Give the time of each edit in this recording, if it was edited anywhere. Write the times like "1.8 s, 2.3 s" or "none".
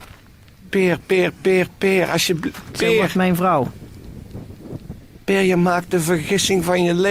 none